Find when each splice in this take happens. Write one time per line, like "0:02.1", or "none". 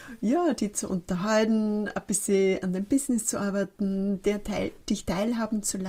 none